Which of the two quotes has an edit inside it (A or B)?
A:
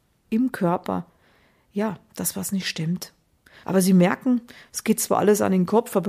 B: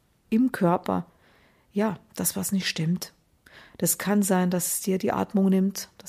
A